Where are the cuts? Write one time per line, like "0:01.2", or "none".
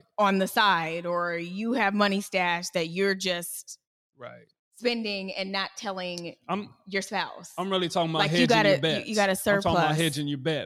none